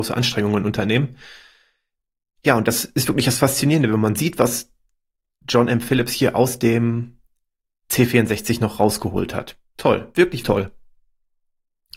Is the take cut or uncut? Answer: cut